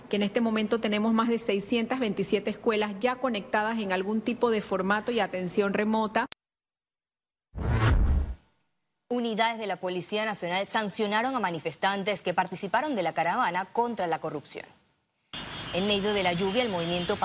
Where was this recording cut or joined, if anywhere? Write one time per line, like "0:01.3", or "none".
none